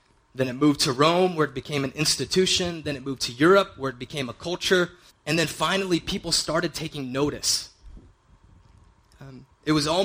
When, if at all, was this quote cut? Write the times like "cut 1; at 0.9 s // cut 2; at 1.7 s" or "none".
cut 1; at 5.1 s